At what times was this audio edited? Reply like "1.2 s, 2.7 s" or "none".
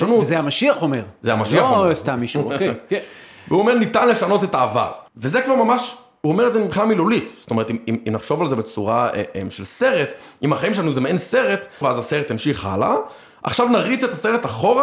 5.1 s, 11.8 s